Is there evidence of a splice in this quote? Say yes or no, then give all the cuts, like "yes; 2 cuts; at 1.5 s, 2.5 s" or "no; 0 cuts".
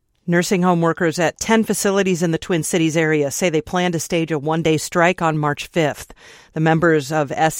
no; 0 cuts